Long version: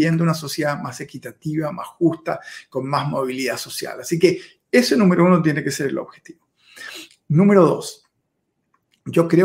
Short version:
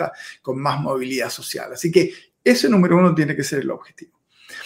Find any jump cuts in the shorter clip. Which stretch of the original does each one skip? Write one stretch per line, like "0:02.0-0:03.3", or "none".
none